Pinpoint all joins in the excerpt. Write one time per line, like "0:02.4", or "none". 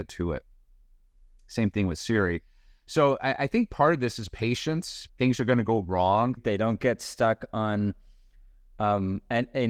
0:05.1
0:06.4

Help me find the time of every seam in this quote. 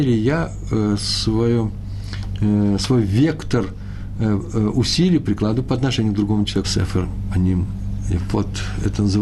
0:06.6

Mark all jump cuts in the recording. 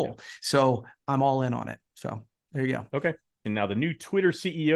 0:03.4

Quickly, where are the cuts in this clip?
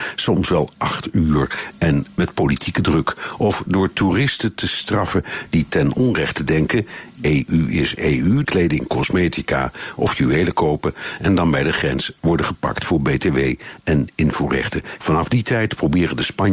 0:08.4
0:15.0

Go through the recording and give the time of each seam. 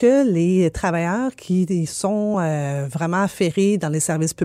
none

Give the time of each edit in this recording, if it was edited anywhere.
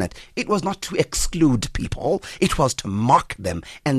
none

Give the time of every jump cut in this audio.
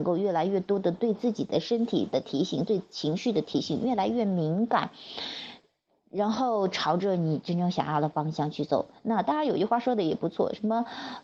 none

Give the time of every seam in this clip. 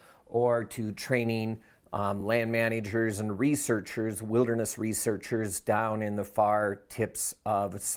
none

